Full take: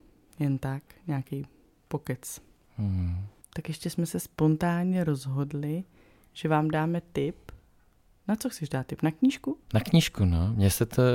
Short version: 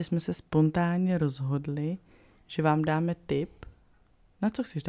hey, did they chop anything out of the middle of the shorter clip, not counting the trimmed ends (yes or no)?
no